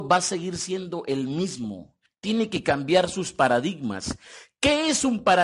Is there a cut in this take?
yes; 1 cut; at 2.1 s

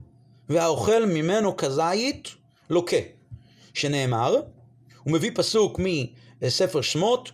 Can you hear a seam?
no; 0 cuts

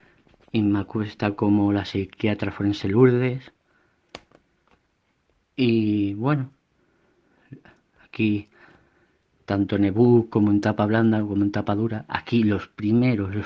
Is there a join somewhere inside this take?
no; 0 cuts

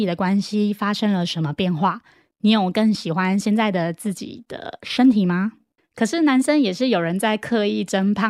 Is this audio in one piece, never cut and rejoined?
no; 1 cut; at 5.8 s

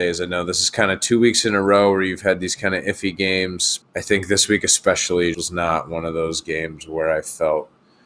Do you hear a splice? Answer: yes; 2 cuts; at 3.8 s, 5.3 s

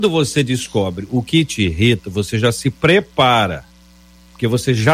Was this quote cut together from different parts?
no; 0 cuts

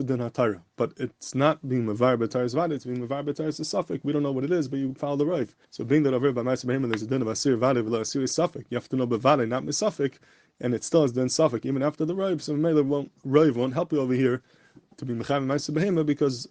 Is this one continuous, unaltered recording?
no; 1 cut; at 5.6 s

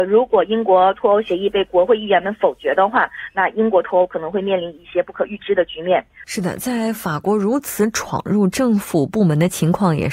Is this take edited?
yes; 1 cut; at 6.2 s

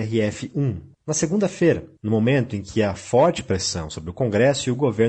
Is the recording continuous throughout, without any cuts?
no; 1 cut; at 0.9 s

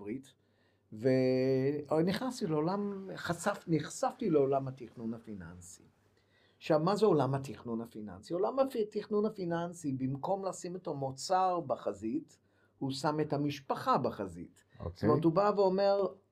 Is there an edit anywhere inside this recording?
no; 0 cuts

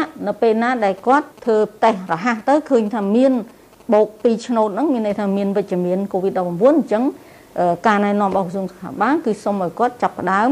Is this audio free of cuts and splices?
yes; 0 cuts

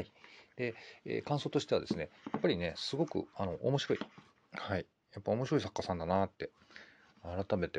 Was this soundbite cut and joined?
no; 0 cuts

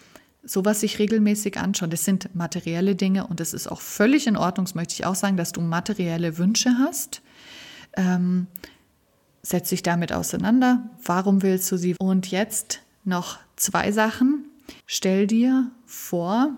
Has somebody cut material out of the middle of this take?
yes; 2 cuts; at 12.0 s, 14.8 s

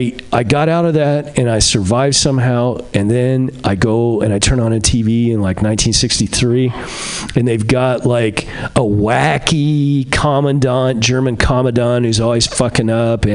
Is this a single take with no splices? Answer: yes; 0 cuts

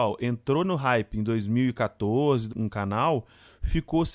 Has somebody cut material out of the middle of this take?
yes; 1 cut; at 2.5 s

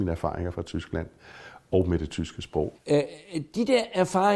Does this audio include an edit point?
yes; 1 cut; at 2.7 s

